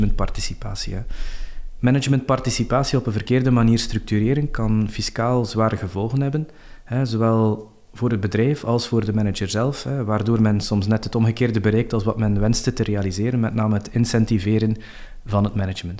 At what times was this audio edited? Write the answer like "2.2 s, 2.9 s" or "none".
none